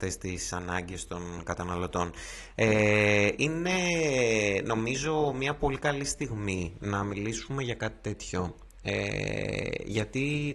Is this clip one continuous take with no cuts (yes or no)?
yes